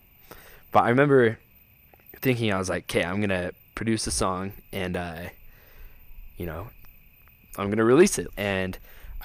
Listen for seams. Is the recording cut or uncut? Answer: cut